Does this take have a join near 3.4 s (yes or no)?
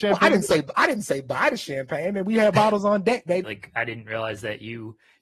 yes